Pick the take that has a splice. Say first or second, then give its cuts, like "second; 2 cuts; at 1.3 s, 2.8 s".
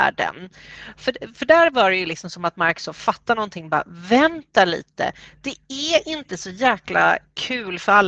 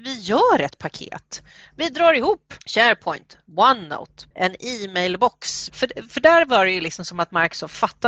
second; 3 cuts; at 2.6 s, 4.3 s, 5.7 s